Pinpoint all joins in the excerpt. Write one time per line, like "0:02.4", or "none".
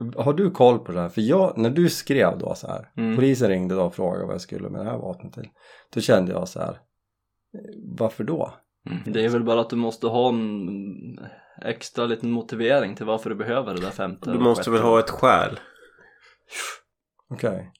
0:09.0